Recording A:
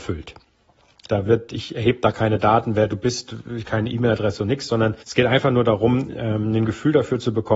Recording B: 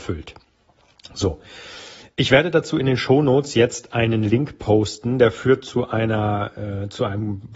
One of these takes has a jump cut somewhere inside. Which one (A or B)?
A